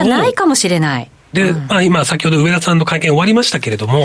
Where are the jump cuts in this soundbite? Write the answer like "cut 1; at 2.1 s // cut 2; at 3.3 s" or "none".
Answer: cut 1; at 1.3 s